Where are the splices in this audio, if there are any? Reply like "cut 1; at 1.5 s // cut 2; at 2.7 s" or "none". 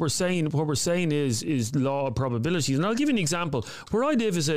none